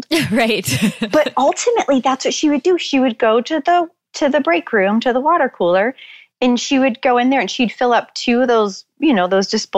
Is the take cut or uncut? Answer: uncut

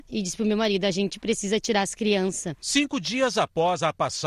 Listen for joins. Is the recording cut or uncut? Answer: cut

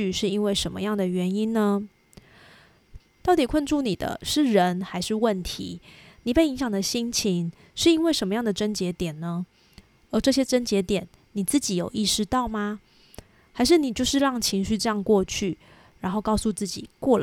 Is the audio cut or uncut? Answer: cut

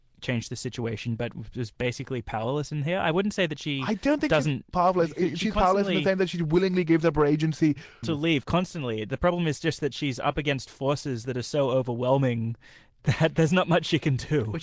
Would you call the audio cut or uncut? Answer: cut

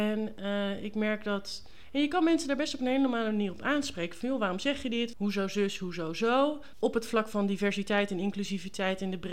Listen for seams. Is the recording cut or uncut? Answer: cut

